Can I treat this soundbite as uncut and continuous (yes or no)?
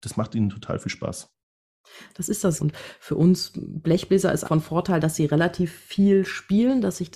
no